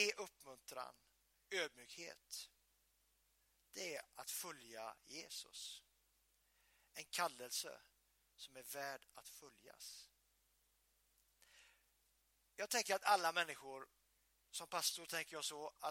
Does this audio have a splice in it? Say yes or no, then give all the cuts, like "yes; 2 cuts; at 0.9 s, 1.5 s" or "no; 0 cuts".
yes; 1 cut; at 1.3 s